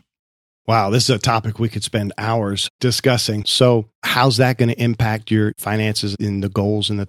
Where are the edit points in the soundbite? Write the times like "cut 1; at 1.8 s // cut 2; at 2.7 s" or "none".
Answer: cut 1; at 3.4 s